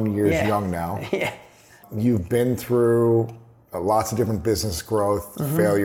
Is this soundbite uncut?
yes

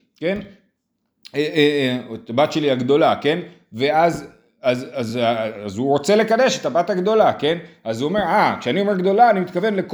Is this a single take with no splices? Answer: yes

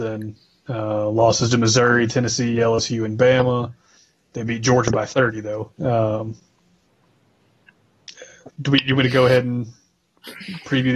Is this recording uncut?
no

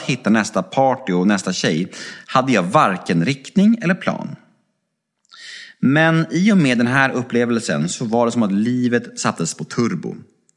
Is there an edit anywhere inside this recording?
no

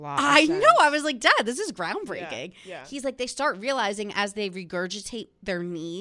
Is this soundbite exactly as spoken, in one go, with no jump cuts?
yes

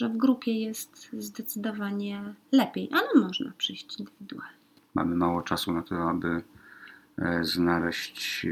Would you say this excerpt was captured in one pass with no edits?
no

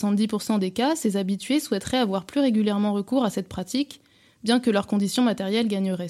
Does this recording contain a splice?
no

